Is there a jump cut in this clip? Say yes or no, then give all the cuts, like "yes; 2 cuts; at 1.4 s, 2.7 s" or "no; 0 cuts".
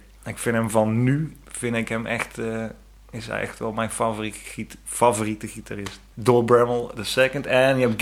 no; 0 cuts